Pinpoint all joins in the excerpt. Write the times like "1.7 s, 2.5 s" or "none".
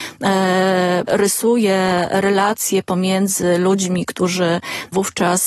1.1 s